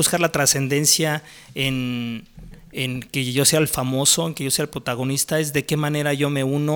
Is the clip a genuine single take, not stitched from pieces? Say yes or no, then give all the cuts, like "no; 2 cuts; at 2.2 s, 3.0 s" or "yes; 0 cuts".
yes; 0 cuts